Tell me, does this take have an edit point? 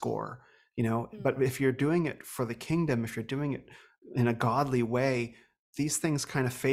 no; 0 cuts

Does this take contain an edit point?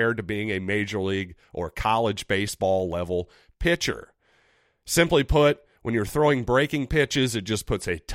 no; 0 cuts

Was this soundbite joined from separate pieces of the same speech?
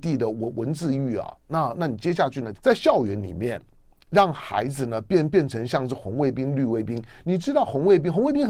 yes; 1 cut; at 2.6 s

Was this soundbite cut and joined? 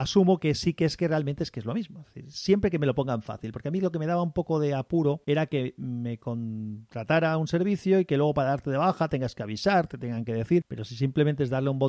no; 0 cuts

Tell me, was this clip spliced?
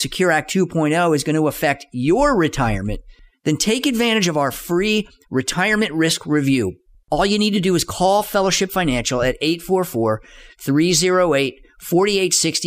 no; 0 cuts

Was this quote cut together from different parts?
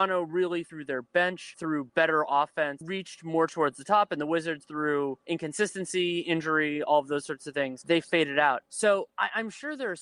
no; 0 cuts

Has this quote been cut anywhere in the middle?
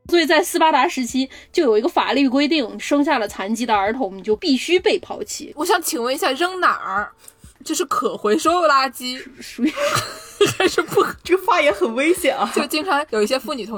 no; 0 cuts

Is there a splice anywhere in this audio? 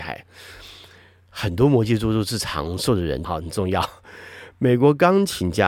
yes; 1 cut; at 3.2 s

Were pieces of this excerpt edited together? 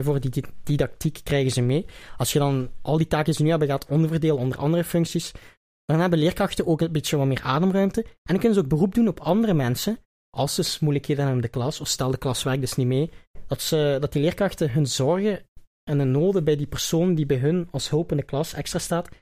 no; 0 cuts

